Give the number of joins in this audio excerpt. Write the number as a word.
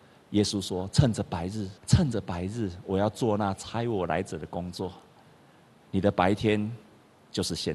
one